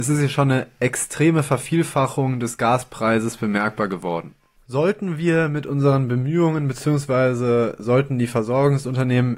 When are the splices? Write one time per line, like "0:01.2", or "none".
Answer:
none